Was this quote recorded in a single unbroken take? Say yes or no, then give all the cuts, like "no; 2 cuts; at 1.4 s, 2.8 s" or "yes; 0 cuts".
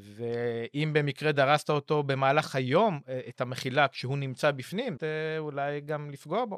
no; 1 cut; at 5.0 s